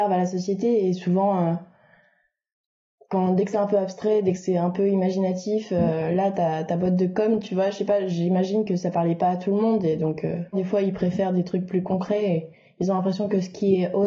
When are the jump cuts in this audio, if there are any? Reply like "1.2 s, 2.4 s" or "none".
10.5 s